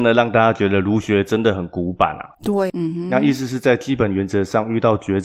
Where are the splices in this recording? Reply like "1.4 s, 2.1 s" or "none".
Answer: 2.7 s